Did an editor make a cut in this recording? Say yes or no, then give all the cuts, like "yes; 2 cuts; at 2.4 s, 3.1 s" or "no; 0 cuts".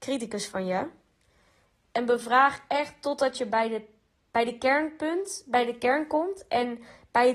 no; 0 cuts